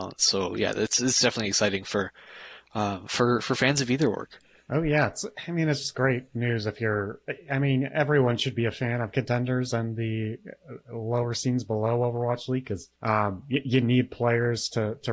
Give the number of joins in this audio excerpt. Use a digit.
1